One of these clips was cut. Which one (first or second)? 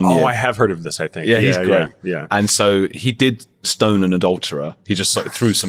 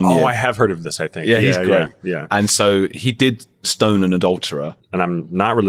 second